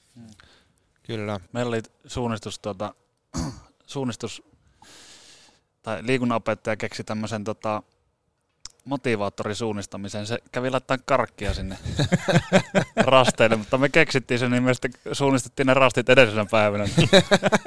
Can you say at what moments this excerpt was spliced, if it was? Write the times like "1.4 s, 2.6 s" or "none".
1.5 s